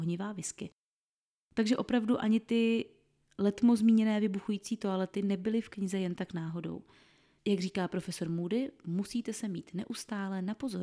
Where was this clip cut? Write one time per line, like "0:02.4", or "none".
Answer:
none